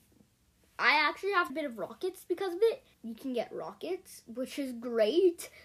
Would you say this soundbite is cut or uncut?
cut